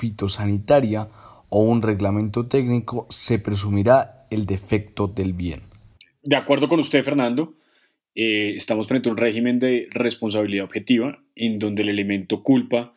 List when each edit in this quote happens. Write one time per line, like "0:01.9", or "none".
none